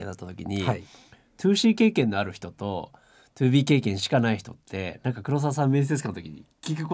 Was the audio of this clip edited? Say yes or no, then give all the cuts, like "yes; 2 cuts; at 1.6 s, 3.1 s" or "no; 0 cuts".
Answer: no; 0 cuts